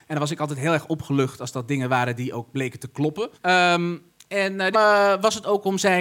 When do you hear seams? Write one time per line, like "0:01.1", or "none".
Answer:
0:03.3
0:04.7